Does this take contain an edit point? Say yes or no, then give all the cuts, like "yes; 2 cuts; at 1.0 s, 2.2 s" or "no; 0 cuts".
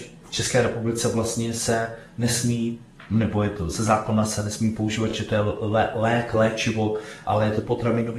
no; 0 cuts